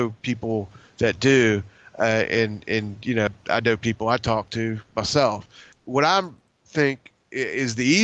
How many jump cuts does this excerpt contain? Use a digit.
2